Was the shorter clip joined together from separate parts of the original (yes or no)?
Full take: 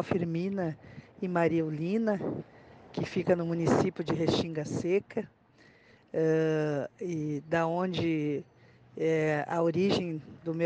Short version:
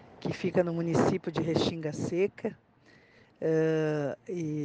no